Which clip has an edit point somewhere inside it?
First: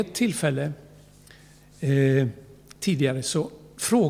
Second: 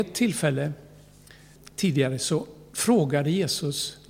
second; 1 cut; at 1.6 s

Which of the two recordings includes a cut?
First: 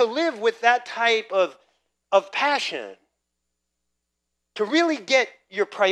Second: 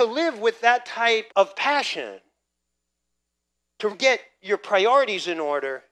second; 2 cuts; at 1.3 s, 3.9 s

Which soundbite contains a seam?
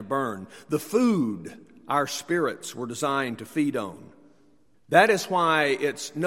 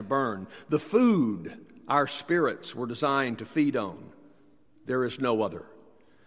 first; 1 cut; at 4.7 s

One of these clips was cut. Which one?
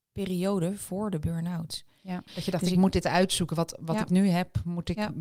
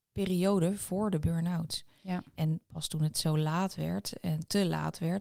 first; 1 cut; at 2.3 s

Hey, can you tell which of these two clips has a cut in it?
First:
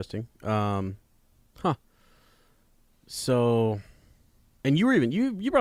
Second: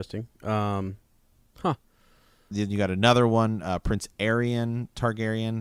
second; 1 cut; at 2.5 s

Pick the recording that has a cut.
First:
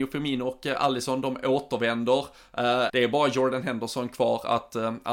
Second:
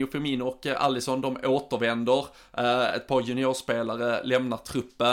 first; 1 cut; at 2.9 s

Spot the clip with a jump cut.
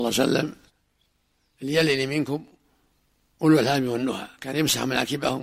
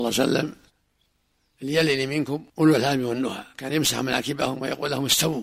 second; 1 cut; at 2.5 s

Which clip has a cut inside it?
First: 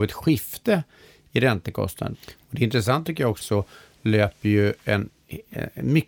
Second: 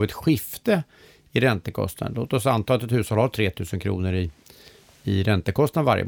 first; 2 cuts; at 2.1 s, 3.4 s

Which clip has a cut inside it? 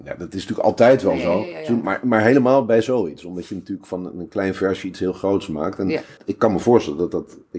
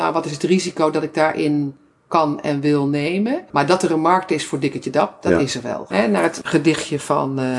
second; 1 cut; at 5.9 s

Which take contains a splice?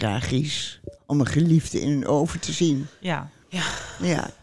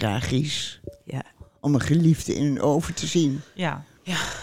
first; 1 cut; at 1.0 s

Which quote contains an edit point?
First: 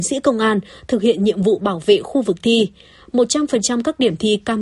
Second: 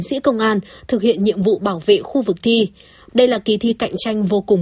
second; 1 cut; at 3.1 s

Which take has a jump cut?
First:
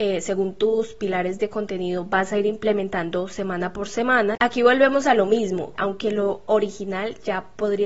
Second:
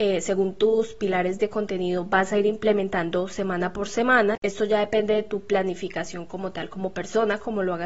first; 2 cuts; at 4.4 s, 5.8 s

